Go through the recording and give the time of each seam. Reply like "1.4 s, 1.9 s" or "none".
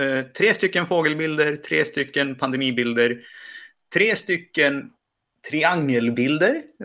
none